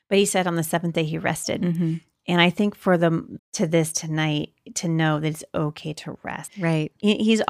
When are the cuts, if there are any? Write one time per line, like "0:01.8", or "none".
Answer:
0:03.4
0:06.5